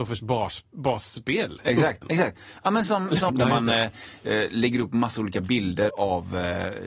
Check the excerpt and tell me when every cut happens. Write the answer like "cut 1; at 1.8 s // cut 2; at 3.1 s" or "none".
cut 1; at 2.0 s // cut 2; at 3.3 s // cut 3; at 5.9 s